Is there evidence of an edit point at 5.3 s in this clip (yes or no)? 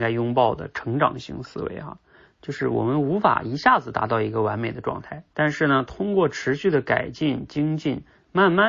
yes